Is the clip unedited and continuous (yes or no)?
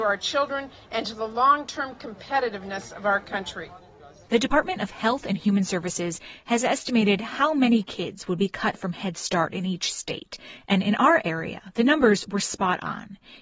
yes